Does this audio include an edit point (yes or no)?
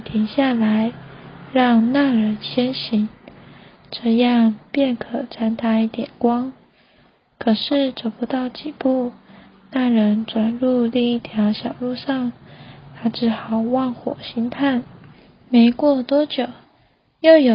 no